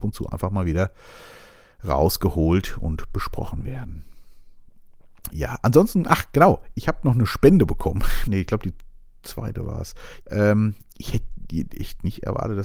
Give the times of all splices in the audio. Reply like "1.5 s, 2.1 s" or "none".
8.3 s, 10.2 s